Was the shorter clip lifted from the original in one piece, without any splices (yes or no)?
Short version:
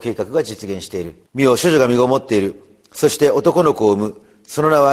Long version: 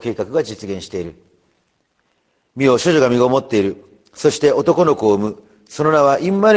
no